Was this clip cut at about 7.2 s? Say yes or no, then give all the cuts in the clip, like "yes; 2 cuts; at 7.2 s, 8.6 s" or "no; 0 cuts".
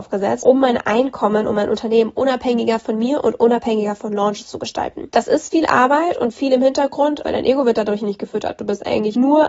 yes; 1 cut; at 7.2 s